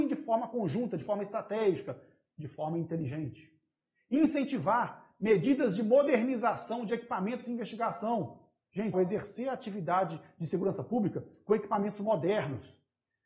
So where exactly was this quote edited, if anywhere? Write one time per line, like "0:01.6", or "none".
0:08.9